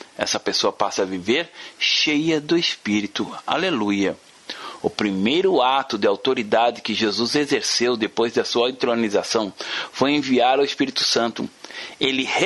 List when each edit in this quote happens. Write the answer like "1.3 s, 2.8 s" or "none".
4.8 s